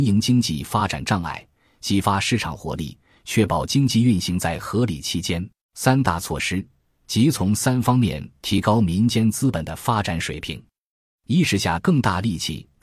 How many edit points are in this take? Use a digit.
1